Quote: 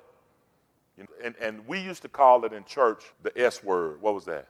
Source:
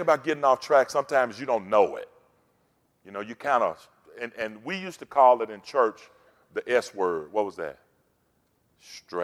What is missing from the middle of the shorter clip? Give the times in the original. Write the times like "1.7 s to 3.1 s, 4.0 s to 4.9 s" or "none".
3.1 s to 4.0 s, 6.1 s to 6.4 s